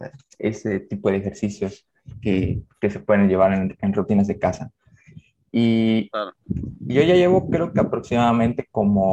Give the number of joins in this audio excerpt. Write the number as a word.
zero